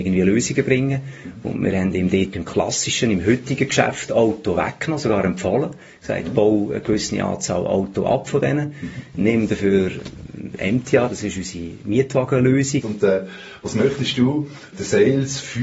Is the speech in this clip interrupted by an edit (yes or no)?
yes